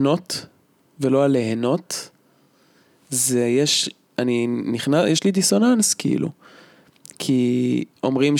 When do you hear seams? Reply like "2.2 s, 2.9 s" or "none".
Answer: none